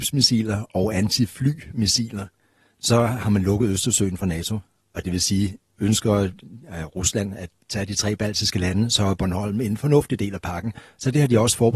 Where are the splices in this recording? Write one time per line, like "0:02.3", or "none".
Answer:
none